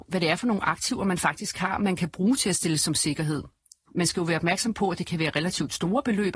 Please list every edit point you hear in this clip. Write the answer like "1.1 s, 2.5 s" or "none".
none